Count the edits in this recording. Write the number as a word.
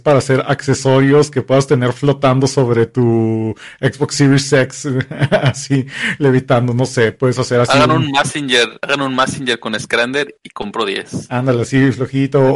zero